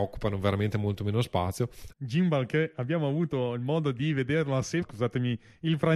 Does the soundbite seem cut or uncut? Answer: cut